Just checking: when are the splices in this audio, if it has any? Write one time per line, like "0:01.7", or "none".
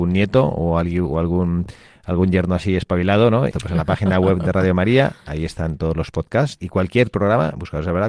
0:03.5

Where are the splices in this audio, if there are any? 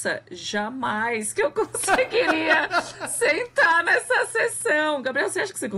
none

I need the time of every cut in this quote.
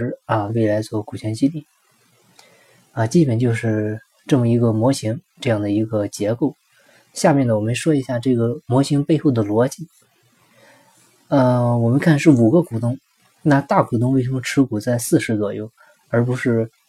none

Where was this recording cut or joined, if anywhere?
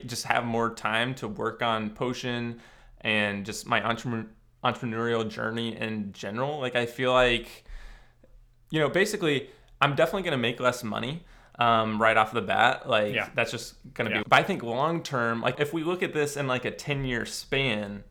0:14.2
0:15.5

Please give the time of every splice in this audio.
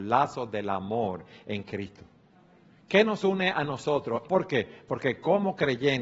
0:04.2

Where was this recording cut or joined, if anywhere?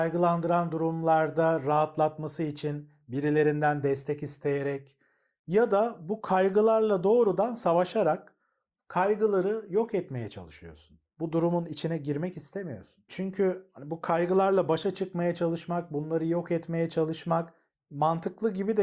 0:13.1

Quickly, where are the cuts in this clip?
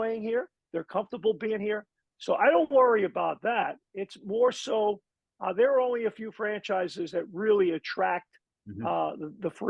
0:02.0

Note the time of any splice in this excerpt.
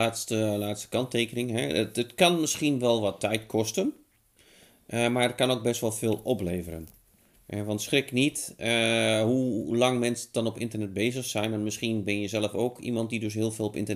none

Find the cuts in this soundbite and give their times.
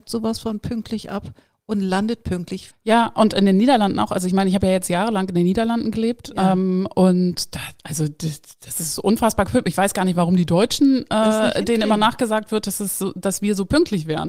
0:02.7

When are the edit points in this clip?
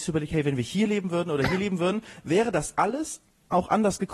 none

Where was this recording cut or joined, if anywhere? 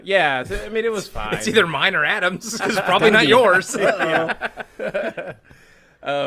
0:02.6

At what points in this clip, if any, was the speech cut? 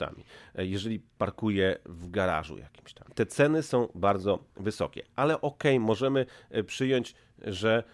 0:03.1

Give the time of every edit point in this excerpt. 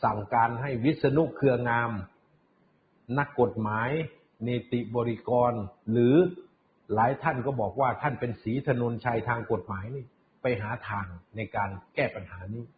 none

